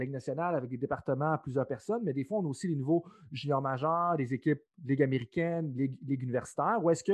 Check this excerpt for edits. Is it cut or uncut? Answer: uncut